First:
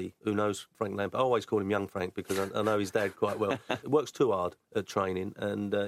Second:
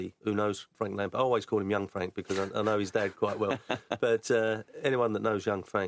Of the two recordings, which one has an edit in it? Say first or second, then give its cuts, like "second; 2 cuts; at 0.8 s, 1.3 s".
first; 1 cut; at 3.8 s